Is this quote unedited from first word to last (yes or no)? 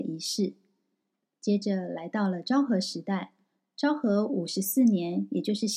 yes